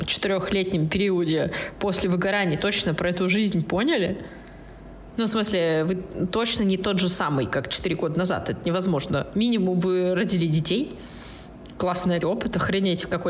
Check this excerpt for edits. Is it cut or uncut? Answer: cut